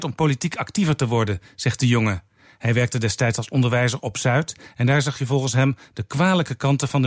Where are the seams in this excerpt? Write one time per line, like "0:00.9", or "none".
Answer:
none